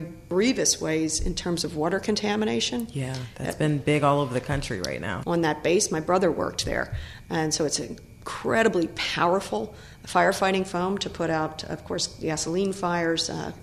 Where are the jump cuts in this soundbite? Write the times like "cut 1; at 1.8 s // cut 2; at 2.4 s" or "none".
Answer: cut 1; at 5.2 s // cut 2; at 7.2 s